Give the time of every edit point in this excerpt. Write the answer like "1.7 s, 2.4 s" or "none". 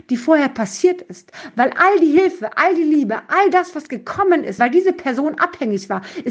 4.6 s